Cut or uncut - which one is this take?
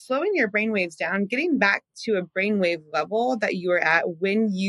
uncut